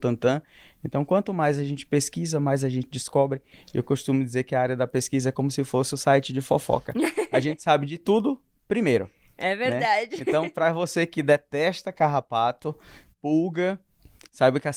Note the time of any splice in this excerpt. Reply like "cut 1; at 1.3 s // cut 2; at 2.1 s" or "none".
none